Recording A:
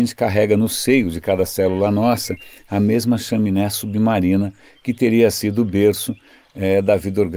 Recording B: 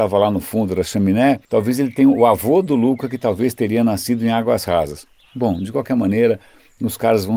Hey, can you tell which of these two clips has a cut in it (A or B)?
B